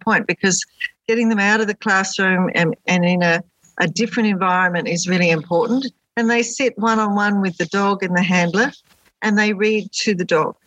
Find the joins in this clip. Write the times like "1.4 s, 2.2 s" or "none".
none